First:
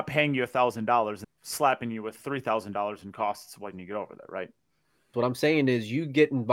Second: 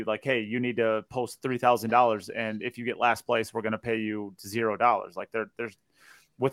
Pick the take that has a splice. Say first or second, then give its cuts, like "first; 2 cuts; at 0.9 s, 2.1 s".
first; 2 cuts; at 1.2 s, 5.1 s